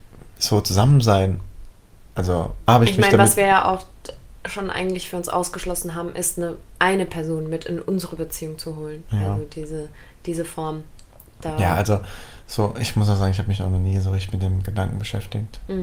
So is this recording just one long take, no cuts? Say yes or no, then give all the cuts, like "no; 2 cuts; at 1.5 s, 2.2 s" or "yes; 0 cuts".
no; 1 cut; at 2.7 s